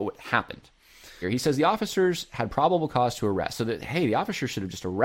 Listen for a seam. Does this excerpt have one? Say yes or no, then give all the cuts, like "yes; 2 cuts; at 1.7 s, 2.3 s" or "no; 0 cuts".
yes; 1 cut; at 1.2 s